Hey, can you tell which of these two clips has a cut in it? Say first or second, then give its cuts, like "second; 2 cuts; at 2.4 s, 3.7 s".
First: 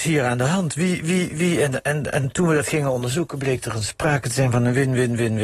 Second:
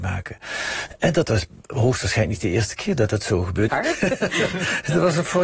second; 1 cut; at 3.7 s